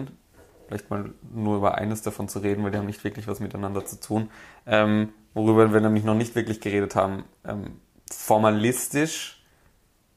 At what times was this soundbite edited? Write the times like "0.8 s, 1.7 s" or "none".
none